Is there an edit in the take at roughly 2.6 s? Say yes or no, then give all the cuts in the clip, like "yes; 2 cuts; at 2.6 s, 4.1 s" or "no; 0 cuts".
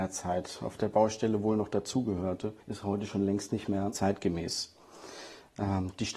yes; 1 cut; at 2.6 s